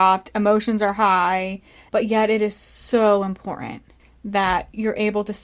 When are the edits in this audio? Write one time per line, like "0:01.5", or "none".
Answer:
0:01.9